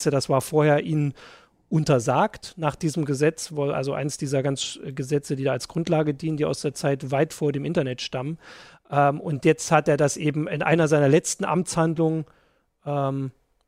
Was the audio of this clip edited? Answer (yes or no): no